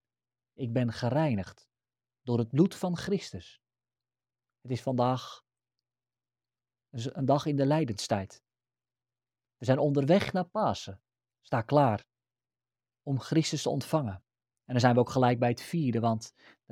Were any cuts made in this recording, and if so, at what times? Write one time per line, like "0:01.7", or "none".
0:11.3